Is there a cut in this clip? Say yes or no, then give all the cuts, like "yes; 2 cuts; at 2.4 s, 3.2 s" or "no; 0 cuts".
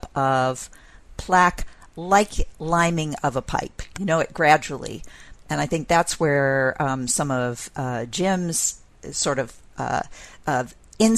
yes; 1 cut; at 5.4 s